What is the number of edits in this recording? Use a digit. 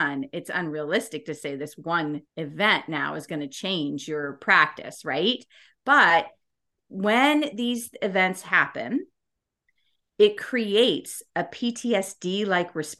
1